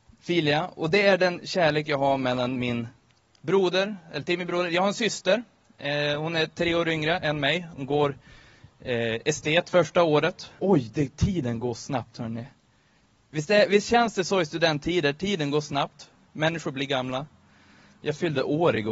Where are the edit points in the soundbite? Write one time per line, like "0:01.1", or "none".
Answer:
0:10.6